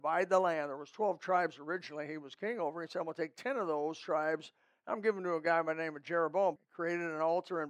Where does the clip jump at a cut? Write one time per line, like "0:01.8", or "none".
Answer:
0:06.6